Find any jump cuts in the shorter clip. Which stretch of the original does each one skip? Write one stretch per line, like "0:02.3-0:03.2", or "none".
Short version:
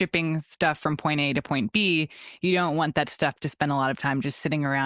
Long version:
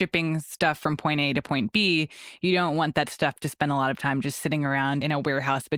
none